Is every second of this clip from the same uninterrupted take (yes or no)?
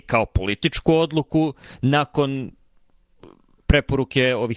yes